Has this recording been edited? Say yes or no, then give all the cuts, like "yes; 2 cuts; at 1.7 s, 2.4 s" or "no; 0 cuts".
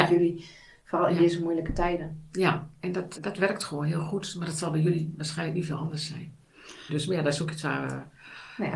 yes; 2 cuts; at 3.1 s, 6.9 s